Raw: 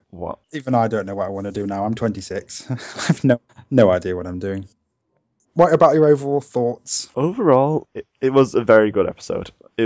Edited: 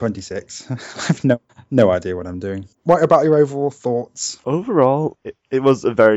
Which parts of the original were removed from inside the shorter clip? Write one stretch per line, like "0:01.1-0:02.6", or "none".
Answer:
0:04.7-0:05.4